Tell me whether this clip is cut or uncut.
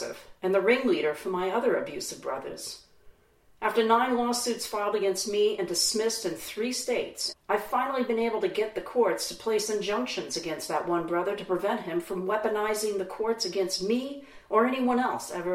cut